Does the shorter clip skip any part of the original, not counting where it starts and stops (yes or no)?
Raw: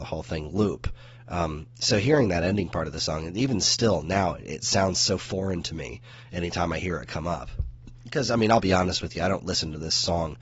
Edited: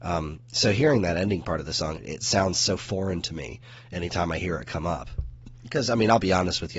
yes